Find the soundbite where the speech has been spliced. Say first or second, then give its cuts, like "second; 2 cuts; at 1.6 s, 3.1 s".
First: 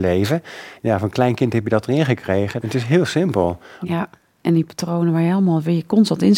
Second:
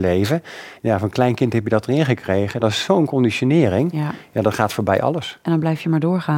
first; 2 cuts; at 2.6 s, 3.9 s